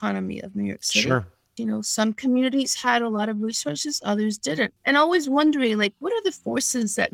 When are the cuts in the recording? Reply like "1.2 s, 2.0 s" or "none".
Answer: 1.6 s, 4.8 s